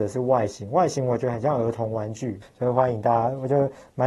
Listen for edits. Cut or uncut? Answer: cut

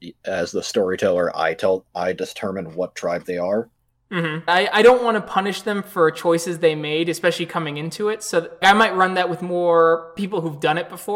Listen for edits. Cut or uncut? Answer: cut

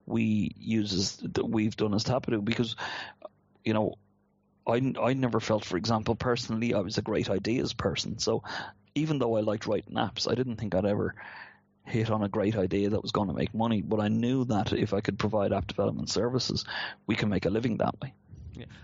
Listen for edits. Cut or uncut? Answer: uncut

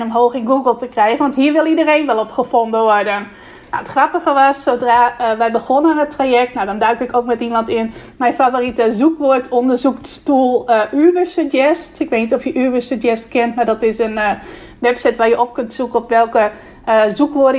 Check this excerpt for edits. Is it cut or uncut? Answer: uncut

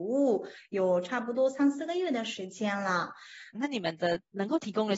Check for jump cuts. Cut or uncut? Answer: cut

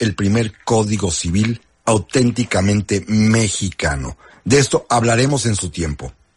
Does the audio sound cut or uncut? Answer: uncut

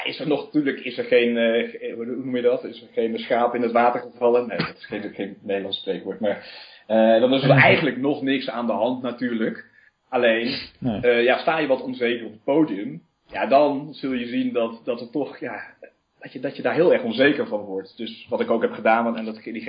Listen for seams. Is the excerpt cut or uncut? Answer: uncut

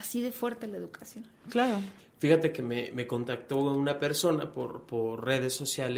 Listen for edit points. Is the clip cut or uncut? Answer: cut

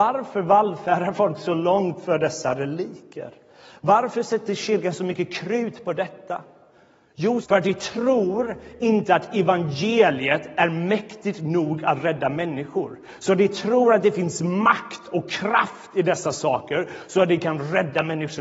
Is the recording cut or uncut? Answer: cut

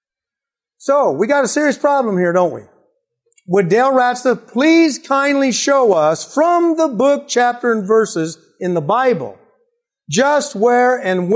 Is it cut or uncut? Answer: uncut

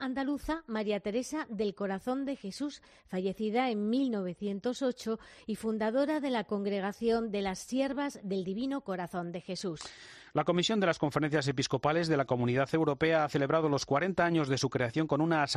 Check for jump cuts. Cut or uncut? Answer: uncut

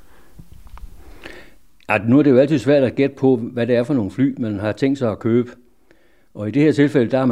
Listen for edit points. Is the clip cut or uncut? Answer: uncut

